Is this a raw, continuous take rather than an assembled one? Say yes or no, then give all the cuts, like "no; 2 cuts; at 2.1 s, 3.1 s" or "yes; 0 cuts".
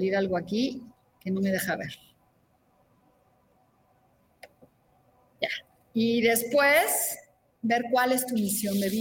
yes; 0 cuts